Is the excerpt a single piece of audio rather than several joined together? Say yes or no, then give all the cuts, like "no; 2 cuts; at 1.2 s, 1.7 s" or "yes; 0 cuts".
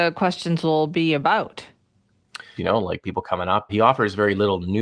no; 2 cuts; at 2.6 s, 3.7 s